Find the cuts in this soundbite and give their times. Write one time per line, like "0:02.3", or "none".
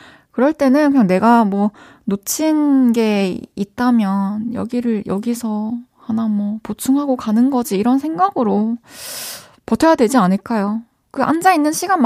none